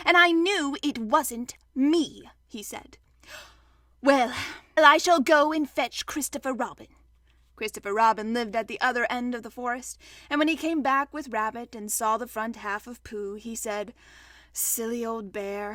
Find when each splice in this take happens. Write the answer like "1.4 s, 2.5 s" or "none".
4.8 s